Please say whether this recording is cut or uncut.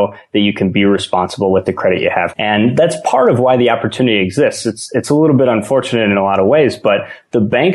cut